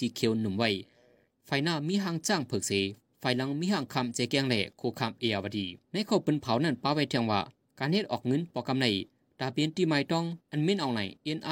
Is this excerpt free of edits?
no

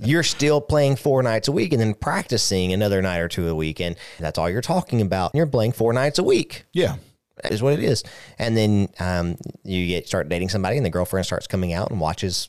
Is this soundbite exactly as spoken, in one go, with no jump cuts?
no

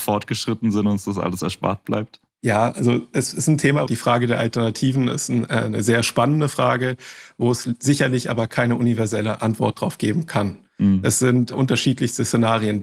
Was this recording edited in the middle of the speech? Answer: yes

